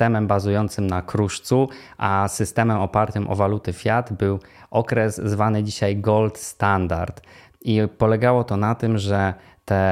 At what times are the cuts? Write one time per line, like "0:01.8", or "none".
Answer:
0:07.5